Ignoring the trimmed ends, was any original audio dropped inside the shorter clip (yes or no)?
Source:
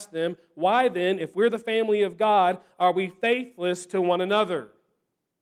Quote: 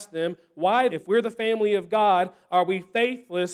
yes